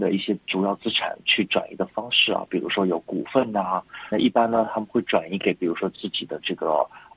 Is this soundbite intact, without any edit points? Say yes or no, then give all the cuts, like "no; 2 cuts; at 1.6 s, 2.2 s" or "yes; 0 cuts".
no; 1 cut; at 4.1 s